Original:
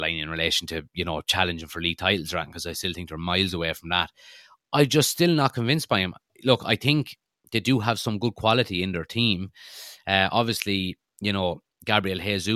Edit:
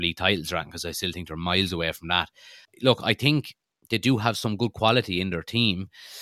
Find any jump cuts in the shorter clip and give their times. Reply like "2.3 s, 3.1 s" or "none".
2.6 s

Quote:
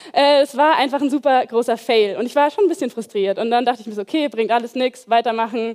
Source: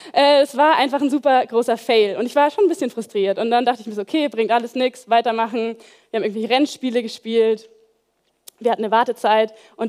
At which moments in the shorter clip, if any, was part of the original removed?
none

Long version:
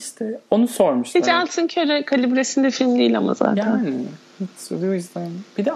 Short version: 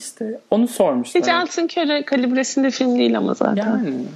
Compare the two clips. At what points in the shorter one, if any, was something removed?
none

